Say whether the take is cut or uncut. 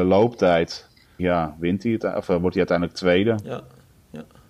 cut